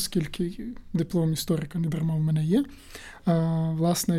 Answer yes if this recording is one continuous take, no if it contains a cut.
yes